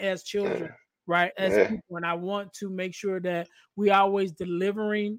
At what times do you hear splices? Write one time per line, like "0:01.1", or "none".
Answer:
0:01.3

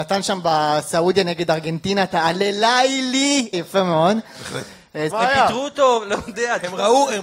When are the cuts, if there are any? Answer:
0:03.5
0:05.1

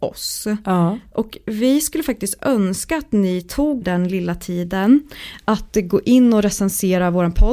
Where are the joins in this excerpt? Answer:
0:03.8

